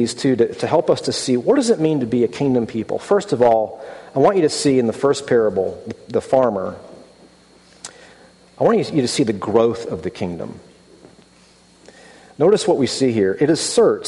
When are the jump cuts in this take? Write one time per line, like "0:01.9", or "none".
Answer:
none